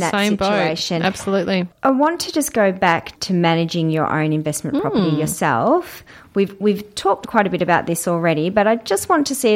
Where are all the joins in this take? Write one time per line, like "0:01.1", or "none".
0:07.2

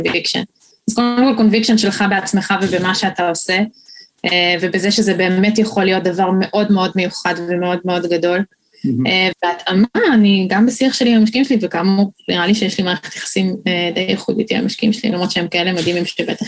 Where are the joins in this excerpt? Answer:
0:09.3

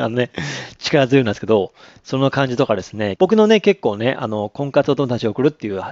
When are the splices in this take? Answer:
0:03.2

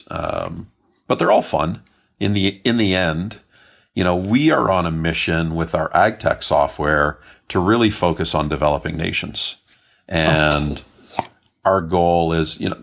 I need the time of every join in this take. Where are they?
none

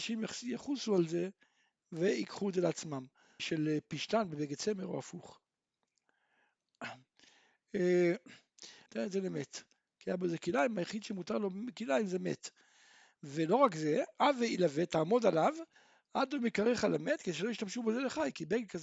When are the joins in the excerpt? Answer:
0:03.4
0:08.9

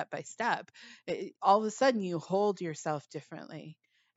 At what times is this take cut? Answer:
0:01.3

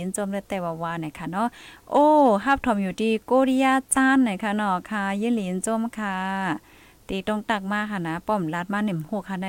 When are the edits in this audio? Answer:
none

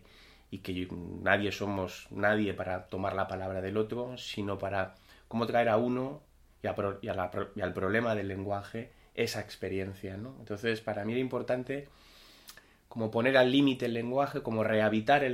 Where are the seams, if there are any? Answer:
none

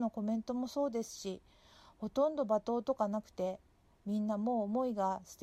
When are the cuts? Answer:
none

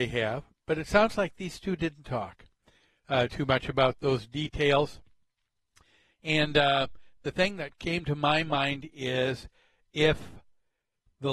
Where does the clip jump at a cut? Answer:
none

